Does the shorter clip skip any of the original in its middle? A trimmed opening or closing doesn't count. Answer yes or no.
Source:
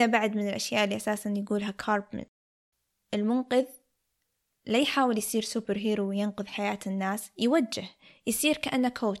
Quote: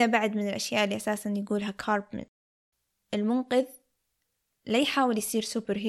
no